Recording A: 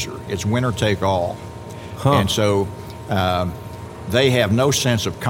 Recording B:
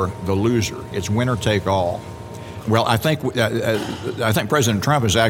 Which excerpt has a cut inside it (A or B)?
B